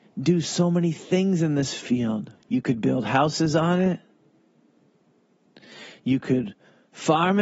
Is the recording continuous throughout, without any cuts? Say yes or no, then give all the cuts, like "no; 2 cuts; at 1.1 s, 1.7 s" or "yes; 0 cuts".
no; 1 cut; at 2.4 s